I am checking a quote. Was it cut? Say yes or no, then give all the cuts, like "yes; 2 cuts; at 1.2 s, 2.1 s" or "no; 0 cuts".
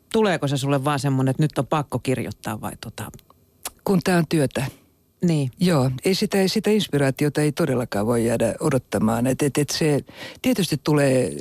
no; 0 cuts